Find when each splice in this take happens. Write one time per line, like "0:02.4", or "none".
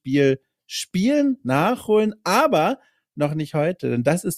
none